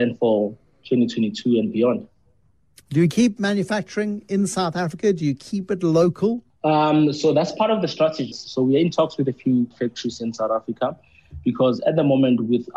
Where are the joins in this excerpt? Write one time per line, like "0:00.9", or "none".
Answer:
0:06.5
0:08.3
0:09.7